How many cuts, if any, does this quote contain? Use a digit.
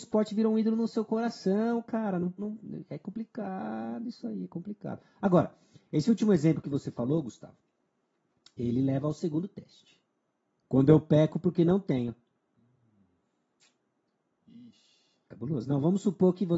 2